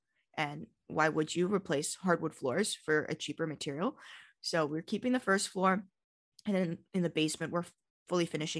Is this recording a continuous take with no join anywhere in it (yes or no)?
yes